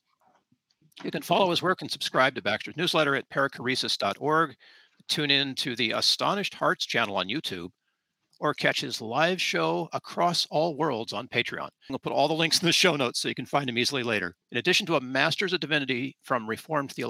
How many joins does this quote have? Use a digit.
2